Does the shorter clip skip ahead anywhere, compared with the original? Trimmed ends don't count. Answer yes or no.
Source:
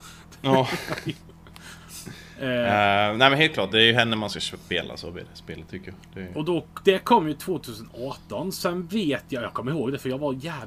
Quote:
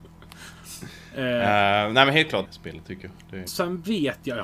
yes